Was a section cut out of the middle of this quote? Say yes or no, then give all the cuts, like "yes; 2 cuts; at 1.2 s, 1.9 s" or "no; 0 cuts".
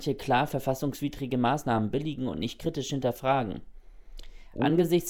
no; 0 cuts